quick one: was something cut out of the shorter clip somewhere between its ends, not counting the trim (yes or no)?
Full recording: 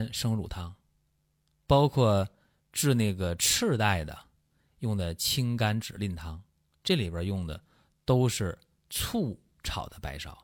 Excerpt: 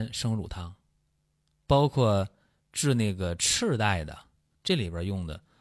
yes